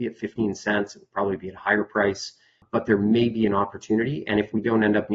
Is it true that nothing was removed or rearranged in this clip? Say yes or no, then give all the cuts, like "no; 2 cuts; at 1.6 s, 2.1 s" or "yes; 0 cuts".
yes; 0 cuts